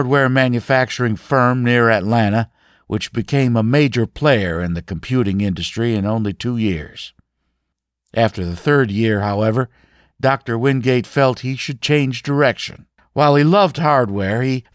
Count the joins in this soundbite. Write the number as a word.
zero